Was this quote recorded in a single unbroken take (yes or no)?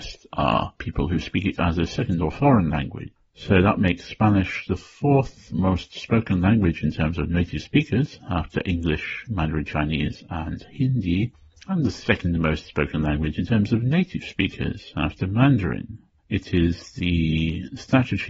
no